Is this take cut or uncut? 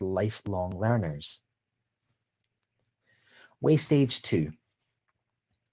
uncut